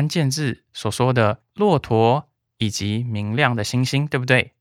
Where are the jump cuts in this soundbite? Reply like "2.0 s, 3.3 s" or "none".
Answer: none